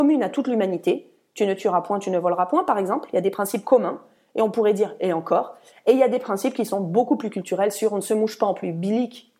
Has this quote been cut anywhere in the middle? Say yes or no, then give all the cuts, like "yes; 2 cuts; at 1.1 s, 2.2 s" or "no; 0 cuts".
no; 0 cuts